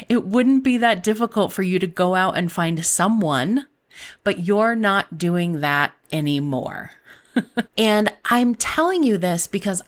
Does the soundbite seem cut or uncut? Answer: cut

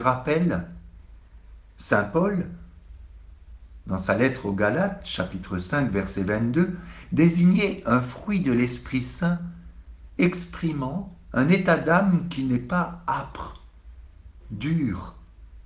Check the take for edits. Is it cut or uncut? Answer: cut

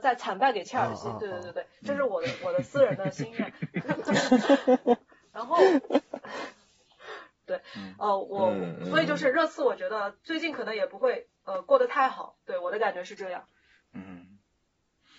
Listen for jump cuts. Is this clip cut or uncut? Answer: cut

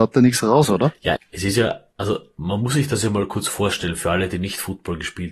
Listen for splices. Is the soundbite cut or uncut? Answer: cut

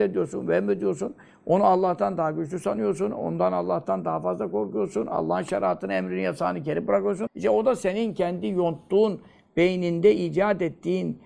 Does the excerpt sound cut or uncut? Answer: cut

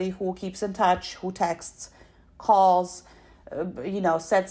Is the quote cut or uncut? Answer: uncut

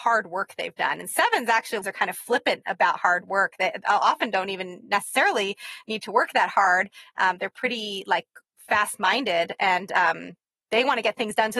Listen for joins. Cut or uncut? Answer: cut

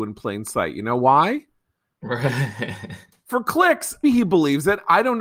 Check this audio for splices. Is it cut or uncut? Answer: cut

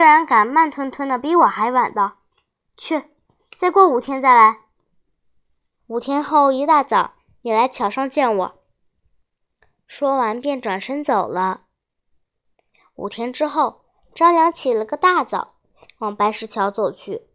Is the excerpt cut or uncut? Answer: cut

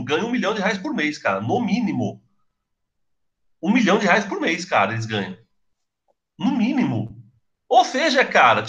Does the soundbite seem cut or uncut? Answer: uncut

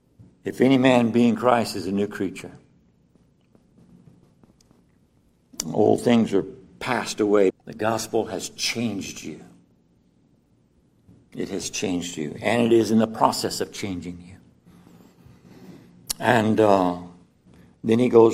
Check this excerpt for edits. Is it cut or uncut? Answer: cut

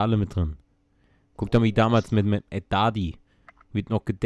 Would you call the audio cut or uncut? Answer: uncut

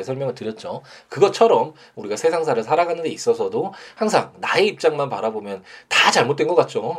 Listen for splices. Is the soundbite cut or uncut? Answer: uncut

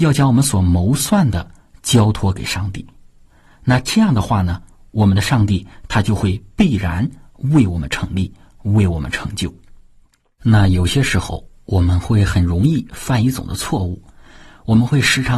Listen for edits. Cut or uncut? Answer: uncut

